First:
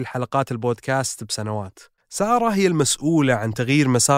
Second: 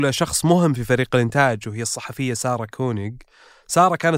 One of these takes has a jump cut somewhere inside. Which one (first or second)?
first